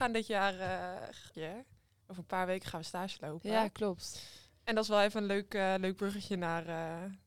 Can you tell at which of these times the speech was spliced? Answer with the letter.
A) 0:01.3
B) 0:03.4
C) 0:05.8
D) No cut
A